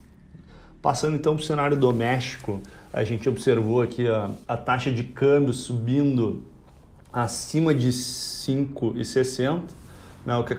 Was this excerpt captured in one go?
no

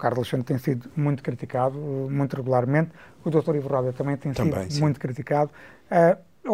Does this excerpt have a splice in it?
no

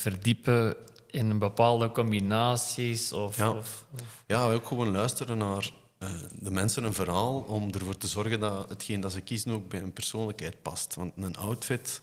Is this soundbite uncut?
yes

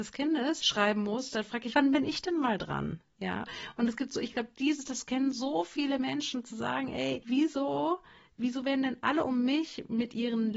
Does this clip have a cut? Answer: no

